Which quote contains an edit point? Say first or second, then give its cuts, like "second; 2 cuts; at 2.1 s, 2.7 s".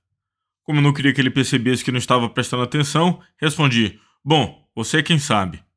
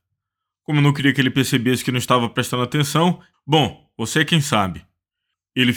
second; 1 cut; at 3.3 s